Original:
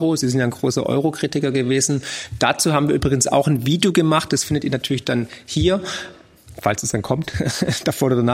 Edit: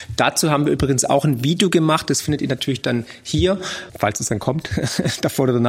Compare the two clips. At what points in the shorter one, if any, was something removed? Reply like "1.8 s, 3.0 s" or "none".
3.9 s